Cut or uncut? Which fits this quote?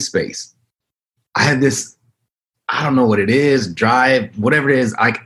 uncut